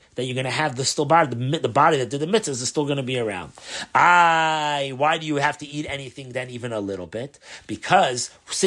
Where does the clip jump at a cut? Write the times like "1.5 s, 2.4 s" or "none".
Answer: none